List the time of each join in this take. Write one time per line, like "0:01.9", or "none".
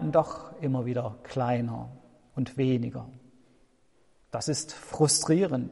none